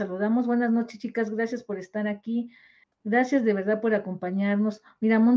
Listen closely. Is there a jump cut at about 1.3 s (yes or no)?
no